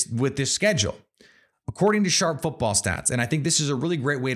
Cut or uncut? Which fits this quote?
uncut